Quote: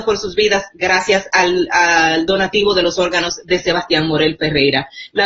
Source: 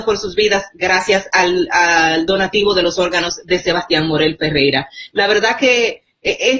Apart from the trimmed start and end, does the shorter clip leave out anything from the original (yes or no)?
no